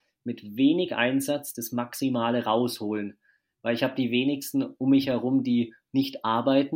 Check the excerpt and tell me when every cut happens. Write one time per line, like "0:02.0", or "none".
none